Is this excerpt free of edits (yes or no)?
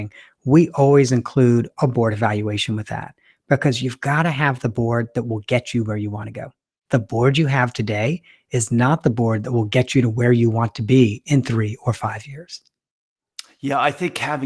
no